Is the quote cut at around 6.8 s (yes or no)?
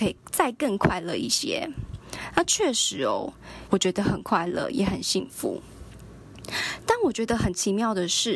no